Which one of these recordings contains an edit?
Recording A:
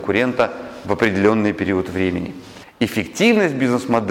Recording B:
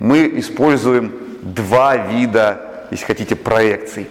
A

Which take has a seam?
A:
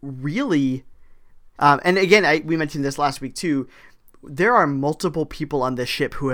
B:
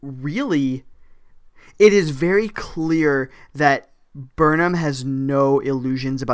A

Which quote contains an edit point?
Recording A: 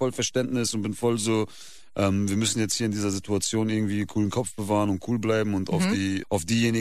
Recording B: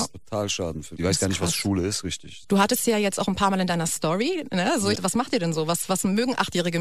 B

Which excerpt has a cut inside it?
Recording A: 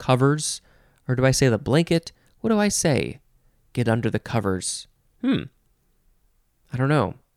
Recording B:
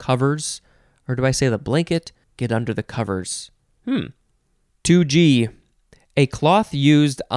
B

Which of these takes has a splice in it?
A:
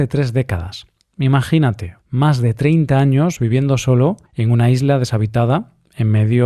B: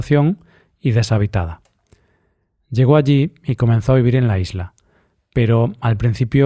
A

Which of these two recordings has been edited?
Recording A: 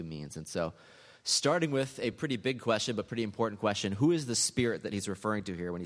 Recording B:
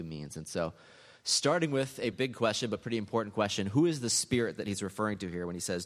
B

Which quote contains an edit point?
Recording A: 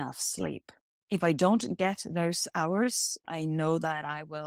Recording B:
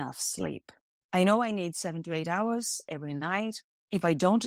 A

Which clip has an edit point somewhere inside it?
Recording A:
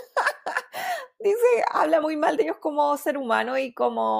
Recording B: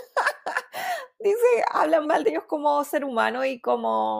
B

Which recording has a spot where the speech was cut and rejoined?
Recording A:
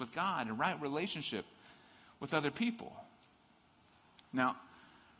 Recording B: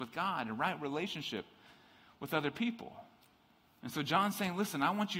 B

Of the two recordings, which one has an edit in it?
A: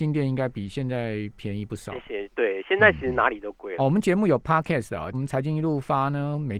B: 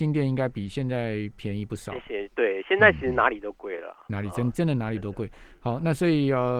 A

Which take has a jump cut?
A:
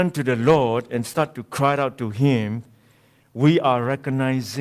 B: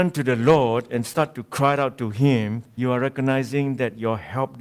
B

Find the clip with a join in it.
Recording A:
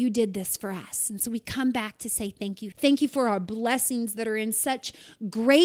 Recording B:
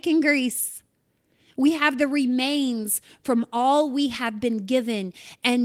A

